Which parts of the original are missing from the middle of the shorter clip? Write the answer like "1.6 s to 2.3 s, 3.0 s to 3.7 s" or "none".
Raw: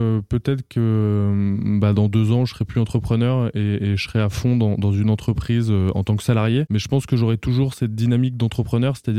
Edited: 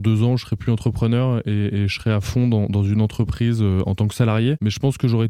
none